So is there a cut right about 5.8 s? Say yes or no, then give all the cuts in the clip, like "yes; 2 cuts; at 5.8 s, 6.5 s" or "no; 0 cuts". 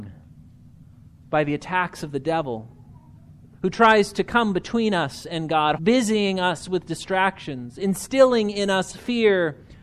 yes; 1 cut; at 5.8 s